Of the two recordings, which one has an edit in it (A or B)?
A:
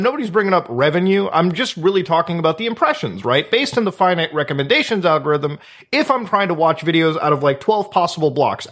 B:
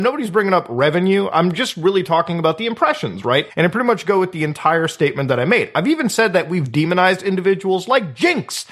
B